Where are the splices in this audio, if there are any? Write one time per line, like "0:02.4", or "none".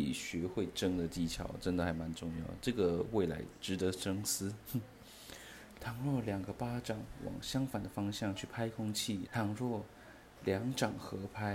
0:05.8
0:09.3